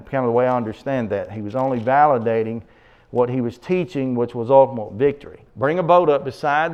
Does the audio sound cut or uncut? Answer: cut